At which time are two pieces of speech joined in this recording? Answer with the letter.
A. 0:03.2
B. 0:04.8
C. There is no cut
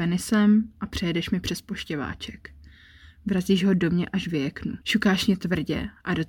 B